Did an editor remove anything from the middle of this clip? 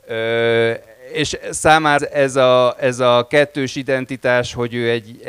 yes; 1 cut; at 2.0 s

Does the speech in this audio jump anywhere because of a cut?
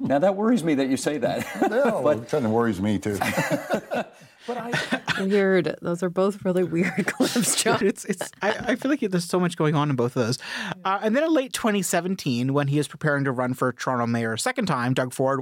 yes; 1 cut; at 7.8 s

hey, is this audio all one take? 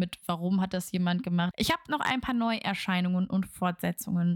no; 1 cut; at 1.5 s

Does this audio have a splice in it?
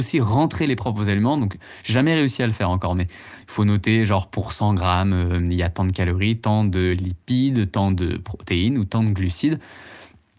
no; 0 cuts

